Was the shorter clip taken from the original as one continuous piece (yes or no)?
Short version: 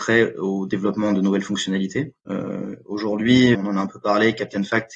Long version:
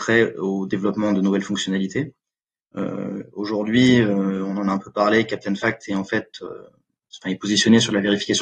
no